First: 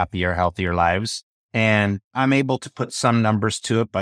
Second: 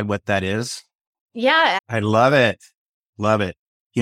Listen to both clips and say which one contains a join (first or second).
second